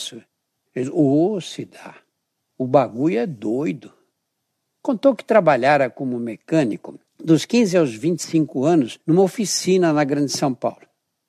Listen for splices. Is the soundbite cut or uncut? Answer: uncut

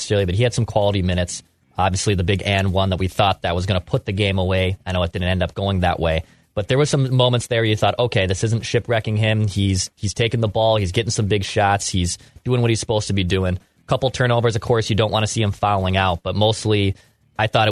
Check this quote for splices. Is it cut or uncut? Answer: uncut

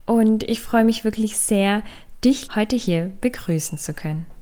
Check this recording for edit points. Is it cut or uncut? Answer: cut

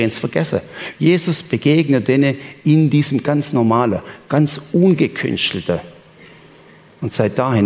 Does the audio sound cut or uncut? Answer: cut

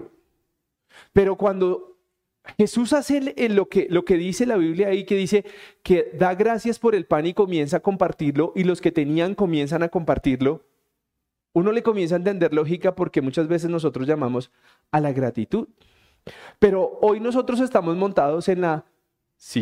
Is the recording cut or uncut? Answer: uncut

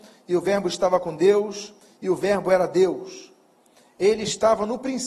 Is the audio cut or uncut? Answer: uncut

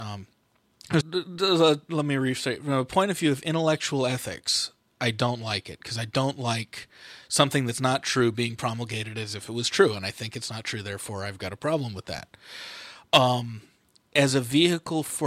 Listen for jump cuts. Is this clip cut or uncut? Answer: cut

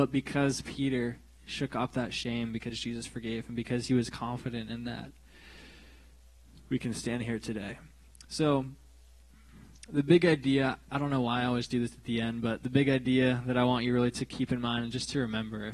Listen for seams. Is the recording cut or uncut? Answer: uncut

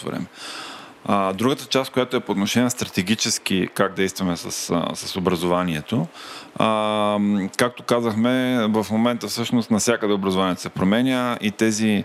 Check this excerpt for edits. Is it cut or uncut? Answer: uncut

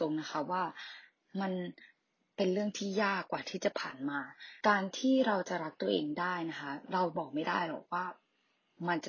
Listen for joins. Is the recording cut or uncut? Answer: cut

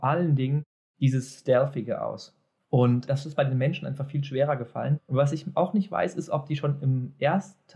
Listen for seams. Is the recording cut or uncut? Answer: uncut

